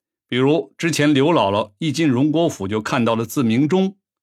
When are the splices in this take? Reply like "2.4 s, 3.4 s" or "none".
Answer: none